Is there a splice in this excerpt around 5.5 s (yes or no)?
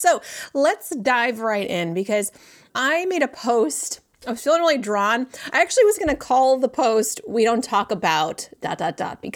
no